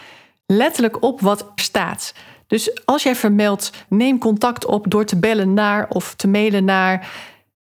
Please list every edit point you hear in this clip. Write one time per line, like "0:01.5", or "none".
0:01.6
0:03.9